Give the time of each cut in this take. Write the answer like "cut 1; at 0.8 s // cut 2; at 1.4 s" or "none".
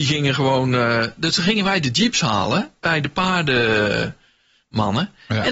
none